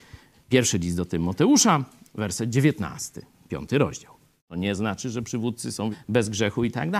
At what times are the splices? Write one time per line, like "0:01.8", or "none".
0:04.4
0:05.9